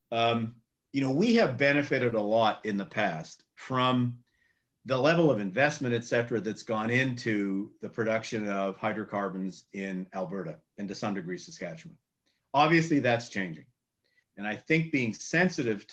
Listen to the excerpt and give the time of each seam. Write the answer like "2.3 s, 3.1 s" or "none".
14.2 s